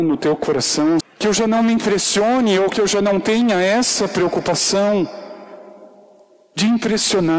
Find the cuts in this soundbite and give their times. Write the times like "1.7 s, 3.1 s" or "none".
1.0 s